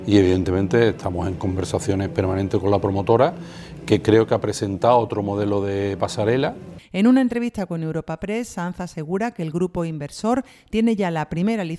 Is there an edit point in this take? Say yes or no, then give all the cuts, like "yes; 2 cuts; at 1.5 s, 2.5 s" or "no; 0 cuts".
yes; 1 cut; at 6.8 s